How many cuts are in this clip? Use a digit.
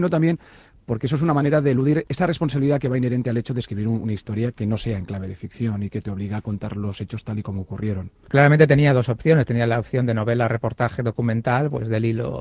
1